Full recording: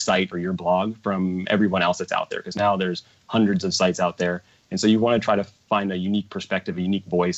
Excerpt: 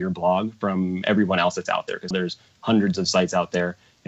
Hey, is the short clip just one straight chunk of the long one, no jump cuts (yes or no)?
no